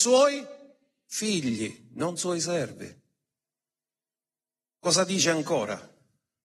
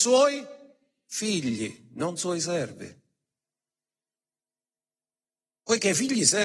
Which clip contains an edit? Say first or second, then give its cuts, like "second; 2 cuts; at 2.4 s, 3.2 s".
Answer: first; 1 cut; at 4.7 s